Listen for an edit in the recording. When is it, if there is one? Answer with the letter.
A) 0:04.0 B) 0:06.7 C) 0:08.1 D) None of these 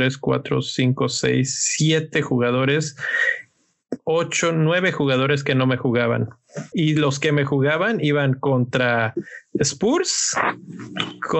B